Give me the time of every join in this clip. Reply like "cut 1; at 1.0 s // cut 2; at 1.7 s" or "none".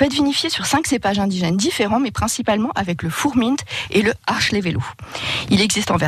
none